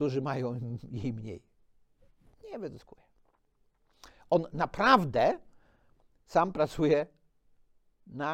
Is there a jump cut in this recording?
no; 0 cuts

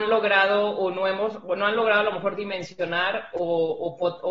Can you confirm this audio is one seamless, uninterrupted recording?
yes; 0 cuts

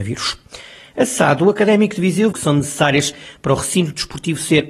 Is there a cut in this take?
yes; 1 cut; at 2.3 s

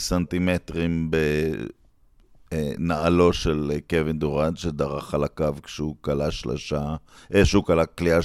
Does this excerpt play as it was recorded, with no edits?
yes; 0 cuts

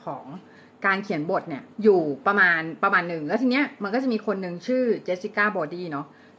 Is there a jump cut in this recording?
yes; 1 cut; at 1.7 s

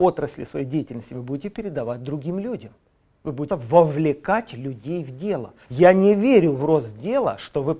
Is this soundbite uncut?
no; 2 cuts; at 3.5 s, 5.6 s

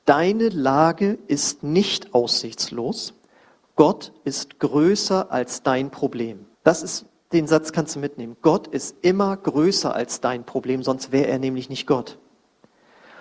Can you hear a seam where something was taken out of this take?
yes; 1 cut; at 6.5 s

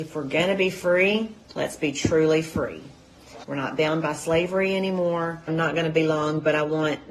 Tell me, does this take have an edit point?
yes; 2 cuts; at 3.4 s, 5.5 s

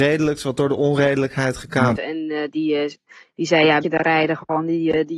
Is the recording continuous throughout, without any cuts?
no; 2 cuts; at 2.0 s, 3.8 s

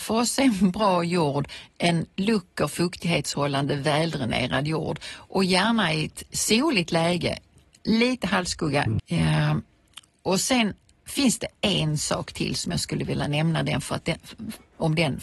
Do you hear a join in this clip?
yes; 1 cut; at 9.0 s

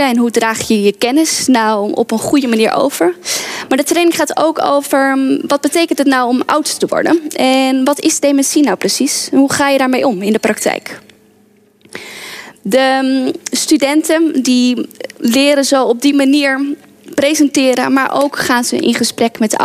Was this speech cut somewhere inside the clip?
no; 0 cuts

